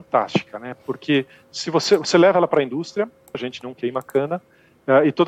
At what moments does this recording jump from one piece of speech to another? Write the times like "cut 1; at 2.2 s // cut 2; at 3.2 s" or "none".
cut 1; at 3.3 s